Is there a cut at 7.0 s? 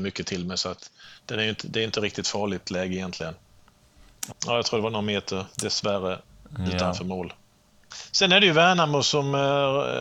no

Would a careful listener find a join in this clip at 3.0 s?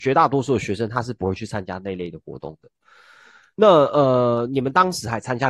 no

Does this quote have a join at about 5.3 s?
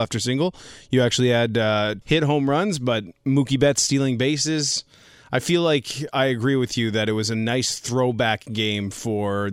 no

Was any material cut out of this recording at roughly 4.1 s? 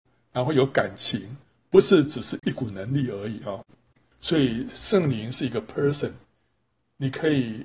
yes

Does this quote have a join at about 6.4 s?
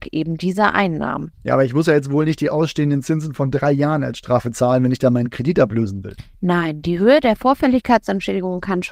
no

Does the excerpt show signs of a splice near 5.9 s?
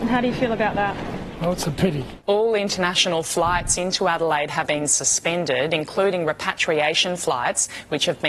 no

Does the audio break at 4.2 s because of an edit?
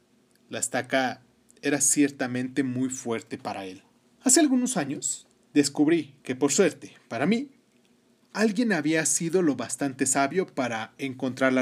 yes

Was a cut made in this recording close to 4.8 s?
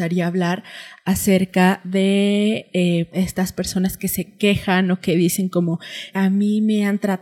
no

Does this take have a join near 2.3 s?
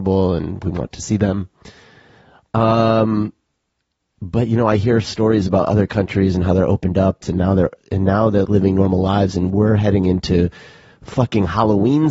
no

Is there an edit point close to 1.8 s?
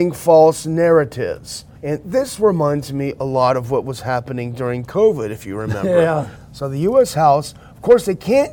yes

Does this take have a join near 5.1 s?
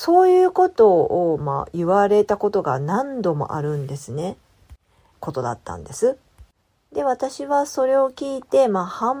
yes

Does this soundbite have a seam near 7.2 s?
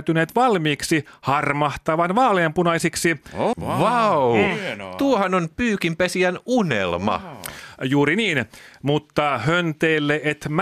no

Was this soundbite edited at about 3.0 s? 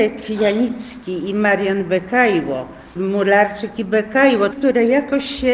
yes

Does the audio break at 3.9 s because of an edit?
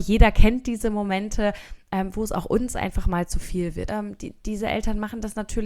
yes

